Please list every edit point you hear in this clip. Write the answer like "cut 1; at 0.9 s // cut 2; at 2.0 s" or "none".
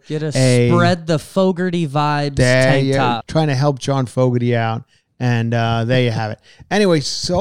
cut 1; at 3.2 s